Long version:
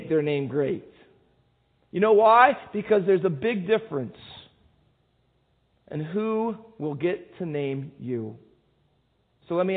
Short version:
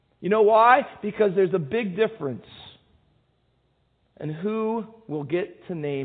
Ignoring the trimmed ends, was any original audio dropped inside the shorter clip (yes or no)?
no